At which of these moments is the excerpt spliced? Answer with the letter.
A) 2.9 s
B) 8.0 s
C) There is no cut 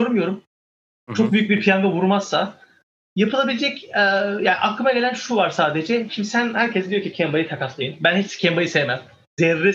C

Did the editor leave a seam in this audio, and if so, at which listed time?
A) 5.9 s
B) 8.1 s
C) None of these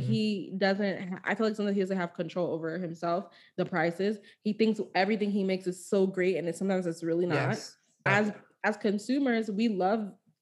B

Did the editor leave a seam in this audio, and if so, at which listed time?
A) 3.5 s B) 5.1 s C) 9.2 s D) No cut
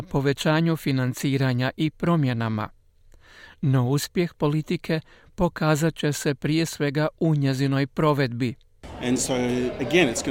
D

